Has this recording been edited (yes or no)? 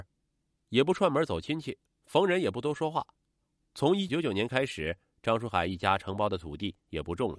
yes